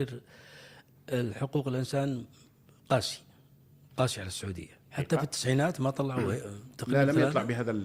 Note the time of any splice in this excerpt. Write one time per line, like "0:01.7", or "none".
0:04.9